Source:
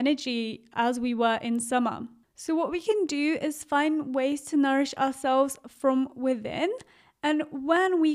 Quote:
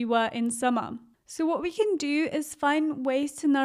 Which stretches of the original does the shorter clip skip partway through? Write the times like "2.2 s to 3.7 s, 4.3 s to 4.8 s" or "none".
none